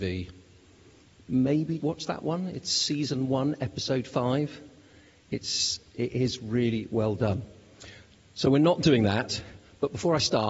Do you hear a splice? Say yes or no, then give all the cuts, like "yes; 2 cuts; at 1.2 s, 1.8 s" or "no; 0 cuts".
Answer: yes; 1 cut; at 1.8 s